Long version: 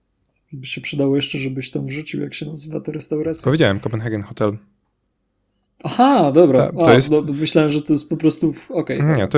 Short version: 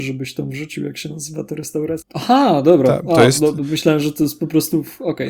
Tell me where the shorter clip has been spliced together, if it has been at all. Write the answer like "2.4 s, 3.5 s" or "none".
2.0 s